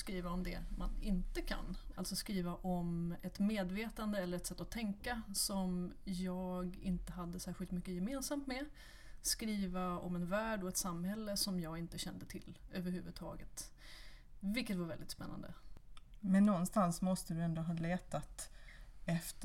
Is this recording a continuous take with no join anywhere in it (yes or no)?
no